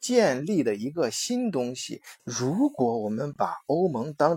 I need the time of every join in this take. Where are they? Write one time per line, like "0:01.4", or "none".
0:02.2